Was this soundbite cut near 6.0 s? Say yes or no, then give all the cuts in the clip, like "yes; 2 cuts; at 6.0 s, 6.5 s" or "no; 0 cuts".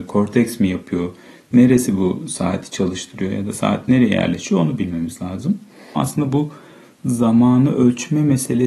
yes; 1 cut; at 6.0 s